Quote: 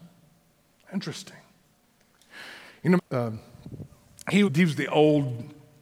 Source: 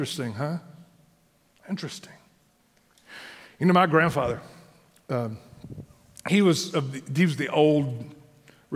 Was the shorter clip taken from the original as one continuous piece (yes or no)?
no